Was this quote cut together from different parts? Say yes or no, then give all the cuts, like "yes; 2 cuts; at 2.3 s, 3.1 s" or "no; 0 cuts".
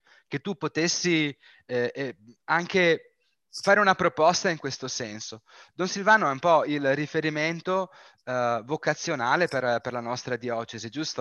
no; 0 cuts